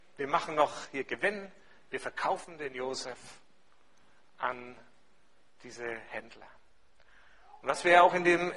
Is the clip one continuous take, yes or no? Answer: yes